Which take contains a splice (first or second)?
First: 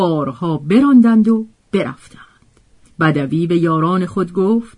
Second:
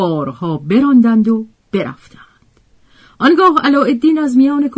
first